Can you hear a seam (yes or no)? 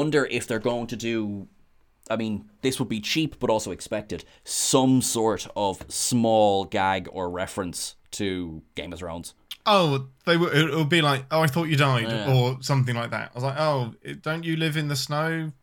no